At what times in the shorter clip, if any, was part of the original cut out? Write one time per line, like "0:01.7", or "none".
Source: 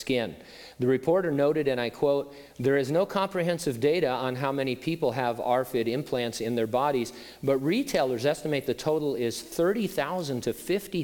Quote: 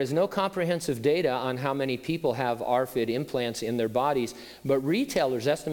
none